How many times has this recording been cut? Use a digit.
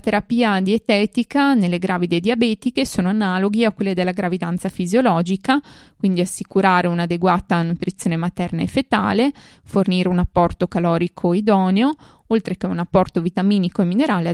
0